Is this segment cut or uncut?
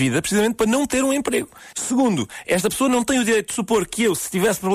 cut